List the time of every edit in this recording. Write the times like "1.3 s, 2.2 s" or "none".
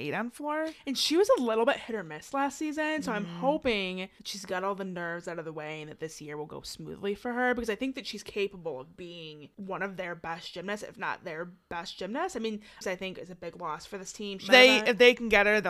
12.8 s, 14.5 s

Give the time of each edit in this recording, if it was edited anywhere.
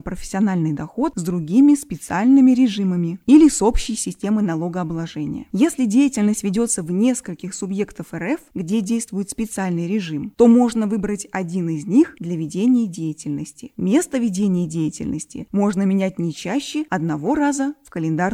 none

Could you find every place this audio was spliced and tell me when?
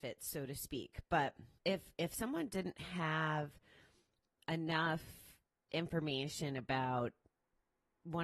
1.5 s

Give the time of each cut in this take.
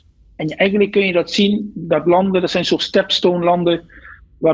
none

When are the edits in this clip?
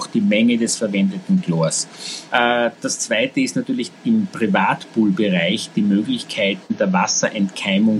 2.3 s, 3.9 s

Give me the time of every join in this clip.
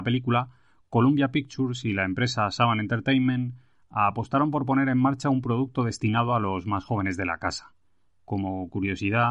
8.1 s

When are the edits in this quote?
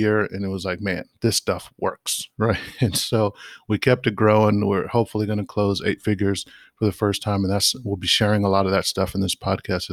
none

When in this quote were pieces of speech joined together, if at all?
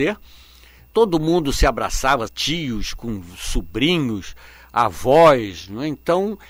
0.9 s, 2.3 s

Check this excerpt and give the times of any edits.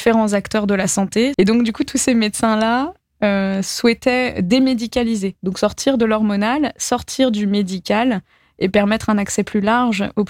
1.3 s

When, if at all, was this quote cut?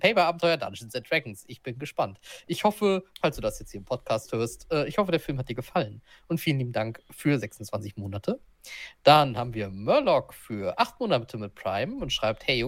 none

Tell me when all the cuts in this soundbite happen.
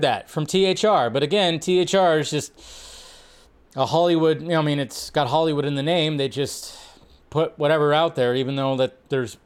none

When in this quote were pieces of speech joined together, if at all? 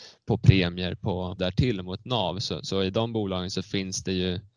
1.4 s

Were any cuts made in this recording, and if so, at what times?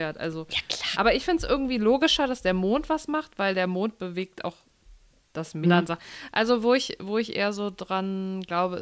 0.9 s, 5.6 s

